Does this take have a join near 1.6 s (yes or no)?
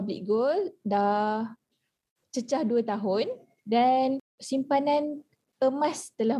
no